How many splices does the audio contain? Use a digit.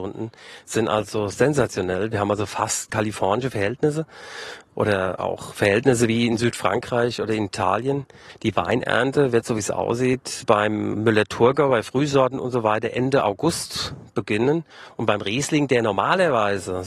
1